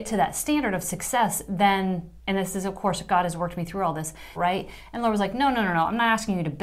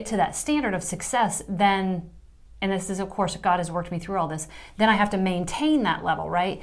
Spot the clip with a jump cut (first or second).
first